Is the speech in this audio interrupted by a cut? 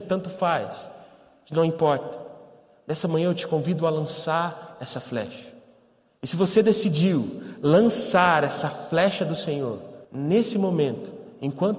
yes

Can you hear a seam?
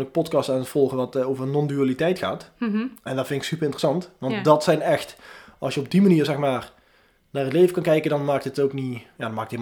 no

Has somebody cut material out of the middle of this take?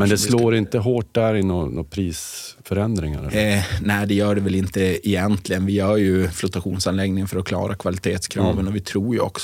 yes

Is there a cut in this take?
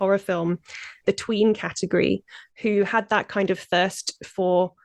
yes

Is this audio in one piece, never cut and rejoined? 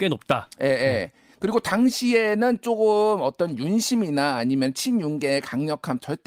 yes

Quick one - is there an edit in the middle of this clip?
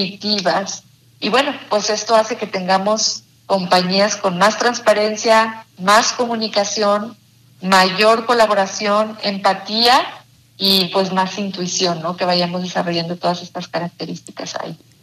yes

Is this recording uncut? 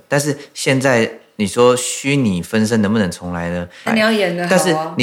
no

